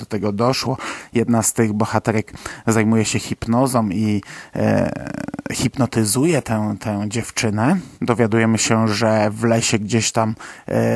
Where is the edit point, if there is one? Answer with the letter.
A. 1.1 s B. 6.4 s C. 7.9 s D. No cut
C